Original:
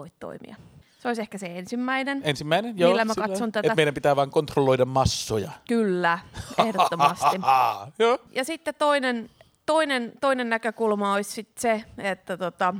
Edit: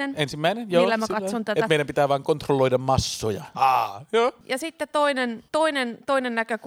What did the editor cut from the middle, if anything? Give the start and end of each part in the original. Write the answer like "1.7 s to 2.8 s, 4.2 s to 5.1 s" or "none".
5.6 s to 7.4 s, 9.3 s to 9.6 s